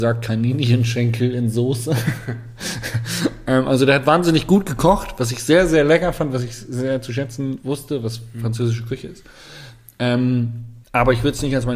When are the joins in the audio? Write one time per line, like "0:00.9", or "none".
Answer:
0:10.8